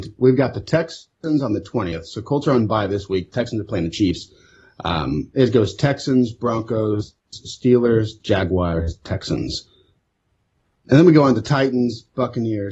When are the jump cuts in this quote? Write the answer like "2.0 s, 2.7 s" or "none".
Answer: 8.2 s